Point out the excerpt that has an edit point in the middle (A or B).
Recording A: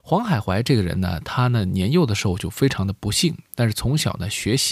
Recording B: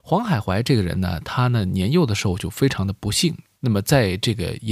B